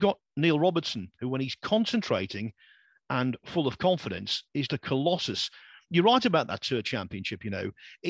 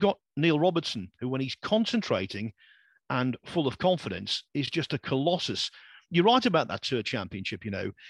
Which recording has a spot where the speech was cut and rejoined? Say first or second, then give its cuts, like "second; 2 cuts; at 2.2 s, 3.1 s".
first; 1 cut; at 4.7 s